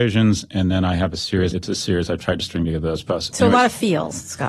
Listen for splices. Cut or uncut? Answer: cut